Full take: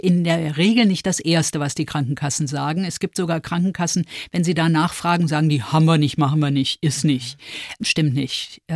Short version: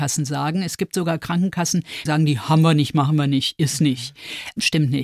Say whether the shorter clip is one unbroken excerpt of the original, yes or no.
no